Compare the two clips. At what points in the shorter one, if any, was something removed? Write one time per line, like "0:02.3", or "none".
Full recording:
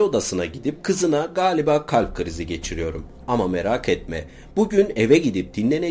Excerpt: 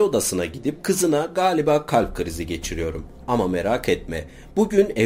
none